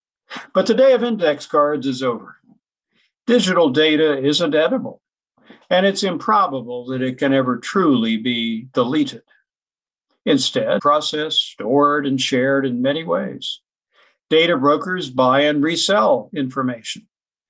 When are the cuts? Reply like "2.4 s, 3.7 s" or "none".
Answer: 10.8 s